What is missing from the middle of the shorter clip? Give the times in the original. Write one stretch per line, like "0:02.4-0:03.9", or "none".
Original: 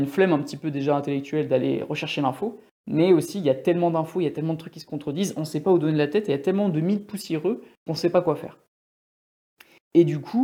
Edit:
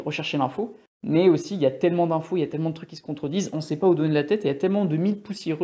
none